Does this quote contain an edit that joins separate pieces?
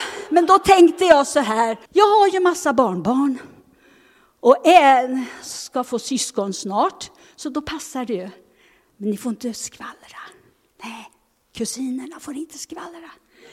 yes; 1 cut; at 1.9 s

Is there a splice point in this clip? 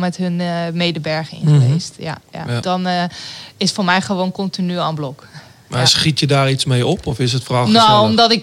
yes; 1 cut; at 2.6 s

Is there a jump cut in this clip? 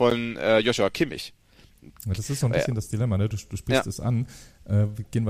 no; 0 cuts

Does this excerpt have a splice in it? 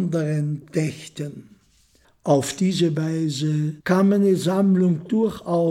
yes; 2 cuts; at 2.0 s, 3.8 s

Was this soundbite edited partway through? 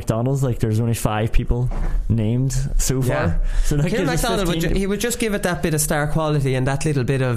no; 0 cuts

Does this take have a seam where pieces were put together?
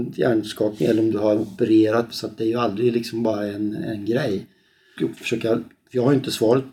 yes; 2 cuts; at 2.1 s, 5.0 s

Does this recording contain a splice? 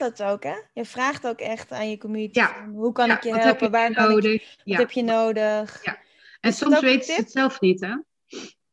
no; 0 cuts

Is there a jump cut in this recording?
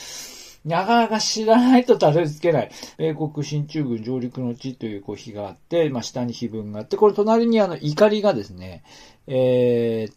yes; 1 cut; at 2.9 s

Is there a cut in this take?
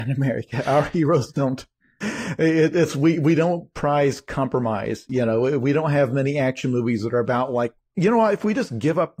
no; 0 cuts

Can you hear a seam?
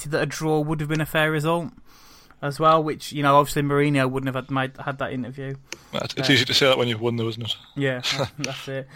no; 0 cuts

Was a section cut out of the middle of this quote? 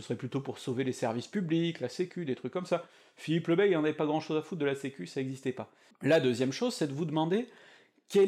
yes; 1 cut; at 5.9 s

